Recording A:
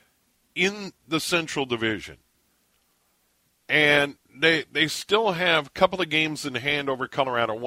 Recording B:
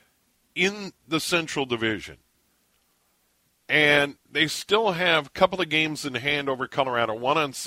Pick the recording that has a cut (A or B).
B